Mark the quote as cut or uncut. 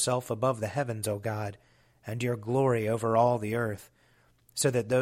uncut